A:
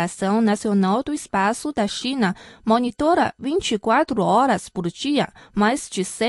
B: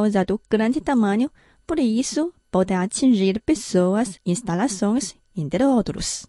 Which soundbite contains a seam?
B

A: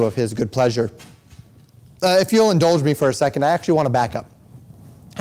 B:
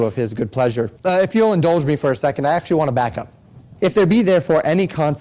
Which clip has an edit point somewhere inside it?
B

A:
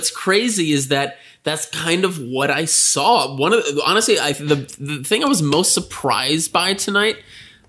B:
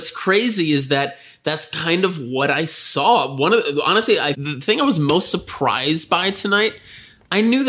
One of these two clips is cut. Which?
B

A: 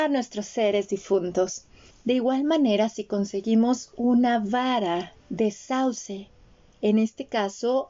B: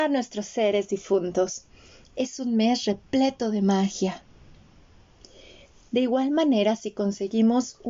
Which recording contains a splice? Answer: A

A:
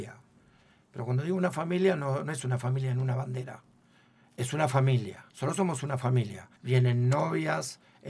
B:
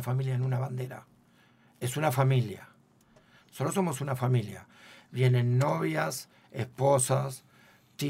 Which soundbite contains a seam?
A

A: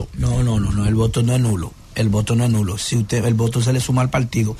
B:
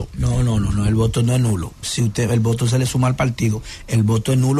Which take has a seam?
B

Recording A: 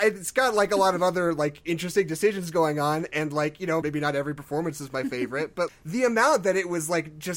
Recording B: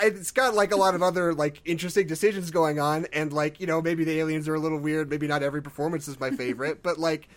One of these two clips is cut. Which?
A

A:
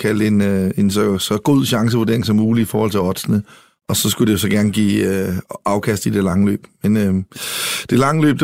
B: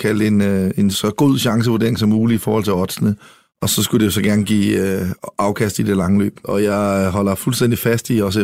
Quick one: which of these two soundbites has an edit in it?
B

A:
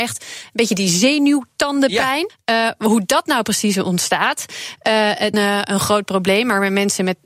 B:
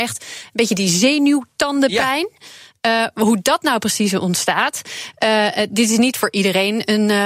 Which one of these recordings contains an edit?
A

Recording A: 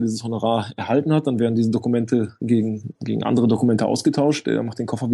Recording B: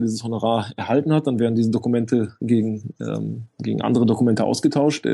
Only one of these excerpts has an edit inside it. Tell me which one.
A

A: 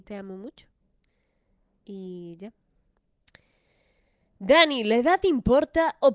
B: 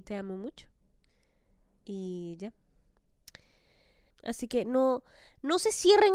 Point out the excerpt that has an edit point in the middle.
B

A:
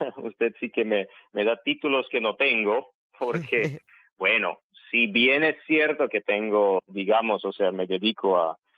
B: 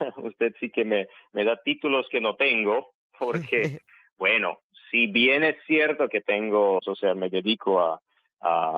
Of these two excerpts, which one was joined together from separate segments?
B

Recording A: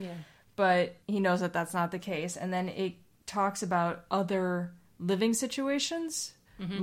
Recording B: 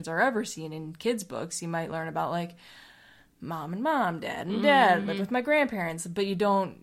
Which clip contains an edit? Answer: A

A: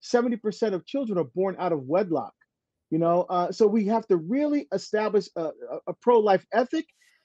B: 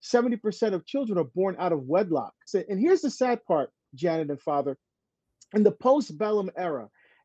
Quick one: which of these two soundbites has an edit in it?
B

